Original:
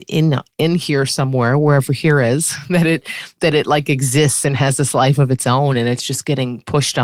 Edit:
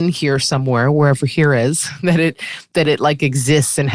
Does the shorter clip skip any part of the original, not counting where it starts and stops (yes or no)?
no